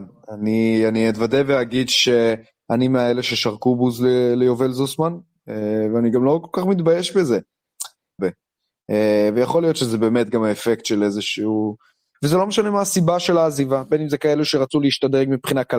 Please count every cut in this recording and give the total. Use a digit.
2